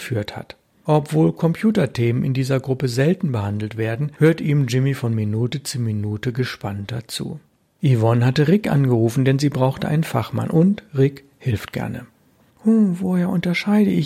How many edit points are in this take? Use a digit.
1